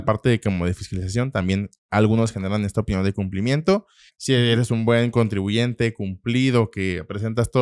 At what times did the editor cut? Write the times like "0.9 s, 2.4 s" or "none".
4.1 s